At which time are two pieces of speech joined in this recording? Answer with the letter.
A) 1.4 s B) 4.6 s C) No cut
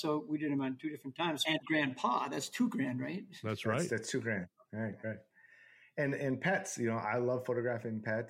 A